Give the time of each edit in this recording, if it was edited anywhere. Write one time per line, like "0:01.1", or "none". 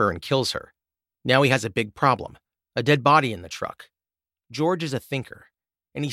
none